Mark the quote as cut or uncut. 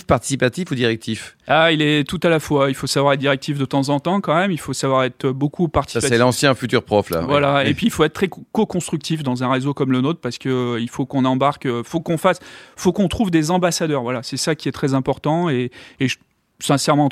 uncut